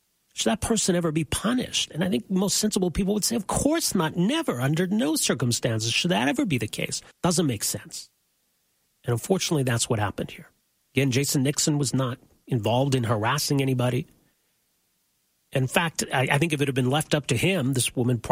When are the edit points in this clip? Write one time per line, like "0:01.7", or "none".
0:07.1